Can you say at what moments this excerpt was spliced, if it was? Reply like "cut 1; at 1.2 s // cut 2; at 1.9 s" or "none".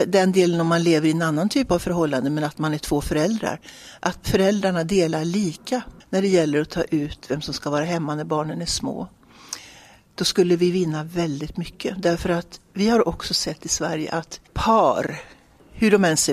cut 1; at 6.0 s